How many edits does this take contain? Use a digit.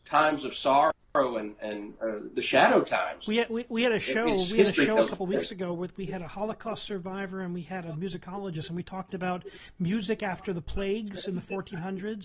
0